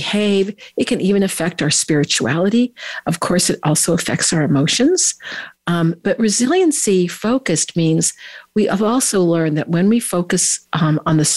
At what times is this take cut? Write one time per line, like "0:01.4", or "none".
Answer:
none